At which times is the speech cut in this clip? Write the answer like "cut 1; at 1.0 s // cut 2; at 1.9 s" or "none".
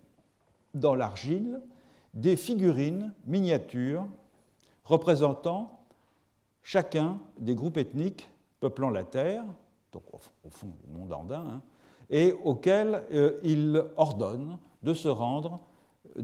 none